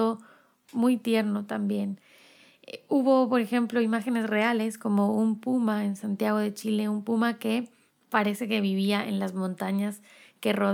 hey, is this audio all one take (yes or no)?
yes